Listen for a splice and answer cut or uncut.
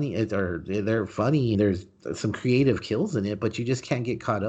cut